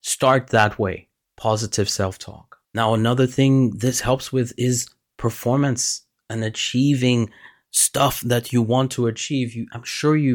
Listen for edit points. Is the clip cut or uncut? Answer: uncut